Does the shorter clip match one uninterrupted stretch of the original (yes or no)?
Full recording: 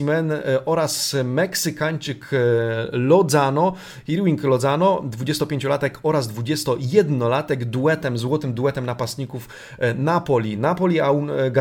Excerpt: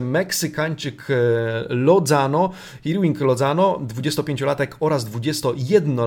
yes